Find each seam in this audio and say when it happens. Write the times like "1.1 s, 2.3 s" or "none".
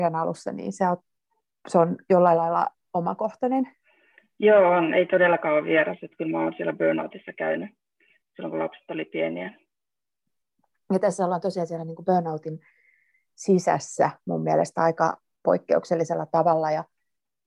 none